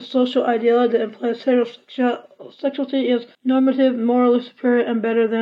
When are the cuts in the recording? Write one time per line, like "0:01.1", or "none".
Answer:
0:03.3